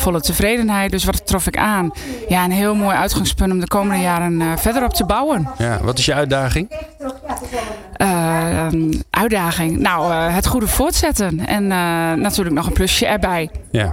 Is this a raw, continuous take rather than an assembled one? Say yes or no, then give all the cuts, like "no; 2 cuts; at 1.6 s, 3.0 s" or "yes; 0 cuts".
yes; 0 cuts